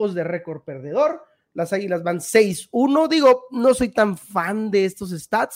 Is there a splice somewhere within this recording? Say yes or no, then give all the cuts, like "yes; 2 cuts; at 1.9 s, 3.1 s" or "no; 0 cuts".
no; 0 cuts